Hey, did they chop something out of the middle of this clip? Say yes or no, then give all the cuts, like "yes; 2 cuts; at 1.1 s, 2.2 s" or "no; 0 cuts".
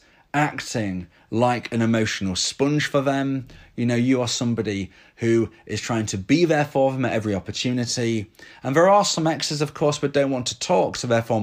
no; 0 cuts